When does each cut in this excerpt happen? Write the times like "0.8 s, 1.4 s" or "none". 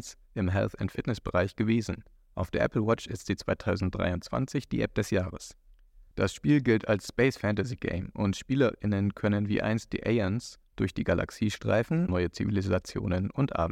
6.1 s, 12.1 s